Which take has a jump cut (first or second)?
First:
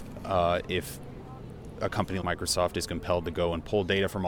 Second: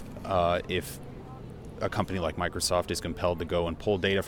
first